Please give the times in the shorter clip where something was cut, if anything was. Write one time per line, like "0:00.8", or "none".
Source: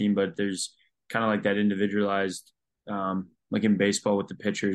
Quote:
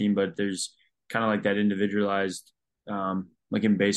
none